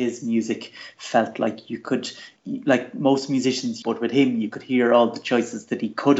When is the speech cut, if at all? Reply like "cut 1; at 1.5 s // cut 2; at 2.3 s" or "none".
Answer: cut 1; at 2.4 s // cut 2; at 3.8 s